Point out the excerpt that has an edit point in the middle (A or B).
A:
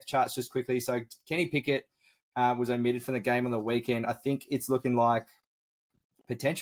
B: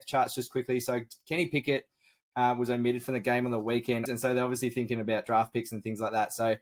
B